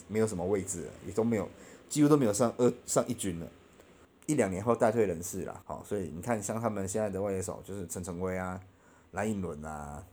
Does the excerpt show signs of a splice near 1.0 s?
no; 2 cuts; at 4.0 s, 5.6 s

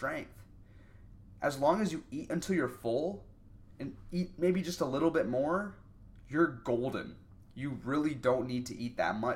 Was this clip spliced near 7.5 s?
yes; 1 cut; at 7.5 s

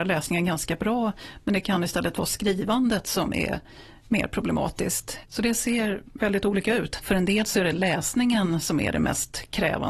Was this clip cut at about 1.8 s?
no; 2 cuts; at 5.2 s, 7.0 s

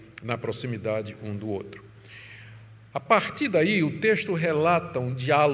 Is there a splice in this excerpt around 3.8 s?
no; 0 cuts

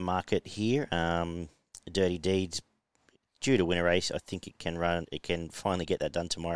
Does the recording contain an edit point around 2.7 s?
no; 0 cuts

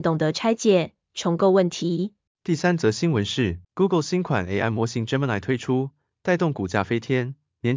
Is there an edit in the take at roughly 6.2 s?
no; 2 cuts; at 2.3 s, 3.6 s

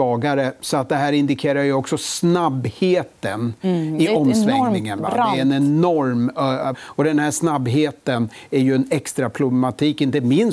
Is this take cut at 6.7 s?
yes; 1 cut; at 6.7 s

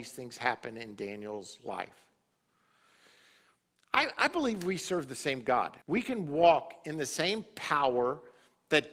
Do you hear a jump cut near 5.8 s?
yes; 1 cut; at 5.8 s

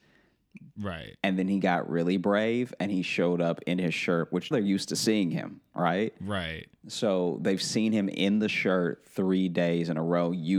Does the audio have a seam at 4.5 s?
yes; 1 cut; at 4.5 s

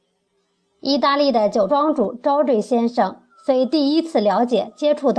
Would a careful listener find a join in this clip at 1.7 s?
yes; 1 cut; at 1.7 s

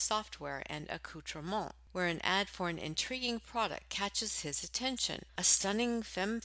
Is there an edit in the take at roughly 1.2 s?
no; 1 cut; at 5.3 s

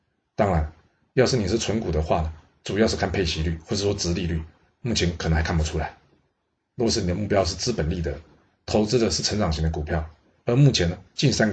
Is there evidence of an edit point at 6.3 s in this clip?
no; 2 cuts; at 4.7 s, 10.4 s

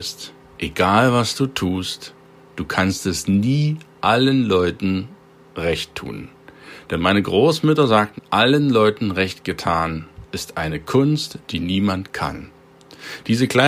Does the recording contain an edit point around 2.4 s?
no; 1 cut; at 8.2 s

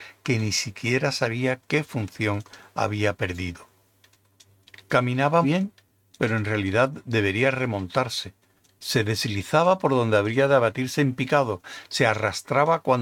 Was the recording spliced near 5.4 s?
yes; 1 cut; at 5.4 s

